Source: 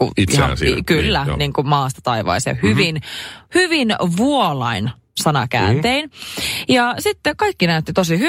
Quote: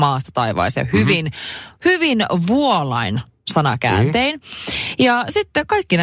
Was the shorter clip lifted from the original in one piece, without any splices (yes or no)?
yes